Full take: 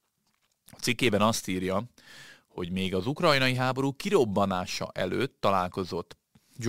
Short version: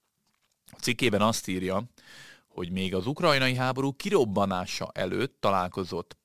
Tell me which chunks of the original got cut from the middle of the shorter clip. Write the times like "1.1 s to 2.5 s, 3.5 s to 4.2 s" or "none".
none